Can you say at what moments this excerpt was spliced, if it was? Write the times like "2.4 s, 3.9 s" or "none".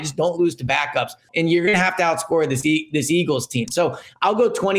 1.3 s, 3.6 s

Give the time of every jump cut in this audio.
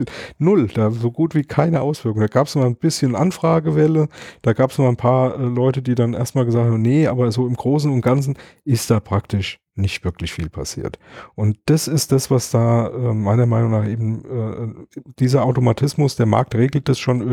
none

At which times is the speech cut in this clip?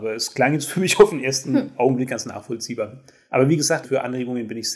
3.8 s

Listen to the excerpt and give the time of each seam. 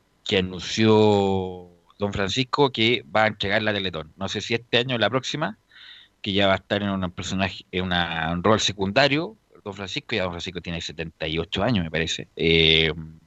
12.3 s

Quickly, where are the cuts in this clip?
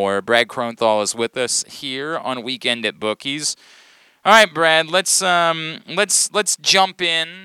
none

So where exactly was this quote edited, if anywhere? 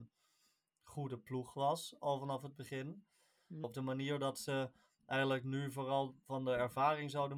3.6 s

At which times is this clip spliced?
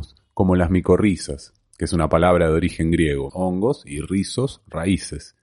3.3 s

